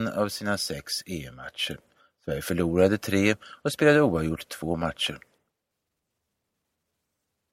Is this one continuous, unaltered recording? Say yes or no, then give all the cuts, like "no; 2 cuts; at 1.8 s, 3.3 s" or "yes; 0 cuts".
yes; 0 cuts